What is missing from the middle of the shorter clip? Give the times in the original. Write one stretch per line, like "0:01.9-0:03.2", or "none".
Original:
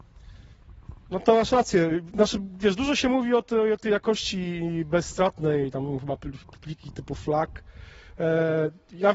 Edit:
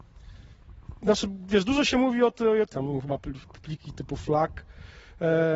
0:01.0-0:02.1
0:03.8-0:05.7